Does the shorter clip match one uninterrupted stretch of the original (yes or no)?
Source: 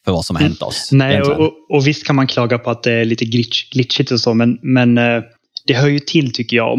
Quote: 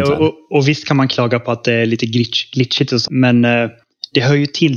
no